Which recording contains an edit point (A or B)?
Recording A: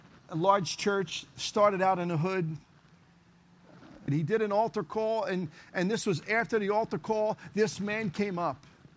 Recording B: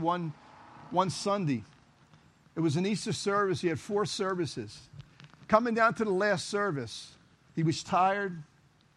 A